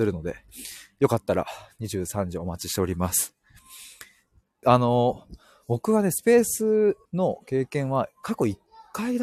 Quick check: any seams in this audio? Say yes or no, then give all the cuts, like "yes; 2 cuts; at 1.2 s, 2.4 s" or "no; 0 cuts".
yes; 2 cuts; at 4.6 s, 7.1 s